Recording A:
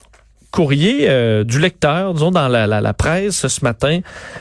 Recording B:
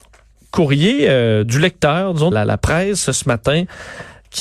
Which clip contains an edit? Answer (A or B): B